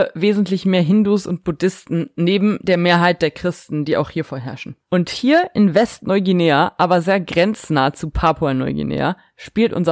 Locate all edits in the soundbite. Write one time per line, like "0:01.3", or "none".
0:04.8

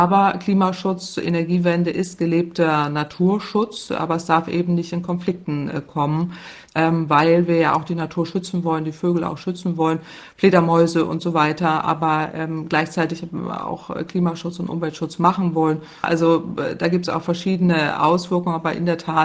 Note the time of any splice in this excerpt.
0:06.7
0:16.0

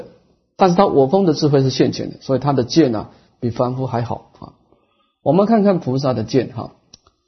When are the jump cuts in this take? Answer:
none

